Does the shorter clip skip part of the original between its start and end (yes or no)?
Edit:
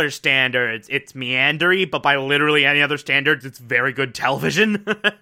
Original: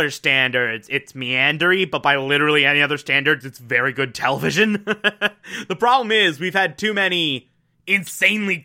no